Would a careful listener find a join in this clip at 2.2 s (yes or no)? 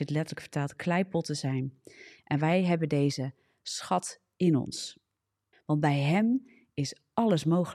no